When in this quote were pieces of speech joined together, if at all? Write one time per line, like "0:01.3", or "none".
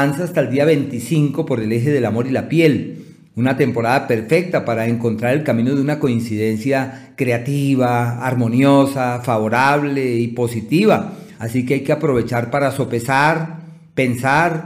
0:11.4